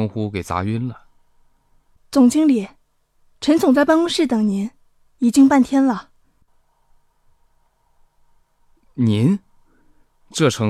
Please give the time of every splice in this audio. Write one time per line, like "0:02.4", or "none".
0:07.6